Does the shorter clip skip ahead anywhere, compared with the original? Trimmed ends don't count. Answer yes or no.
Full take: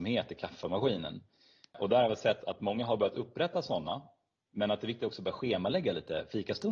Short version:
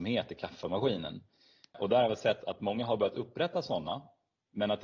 no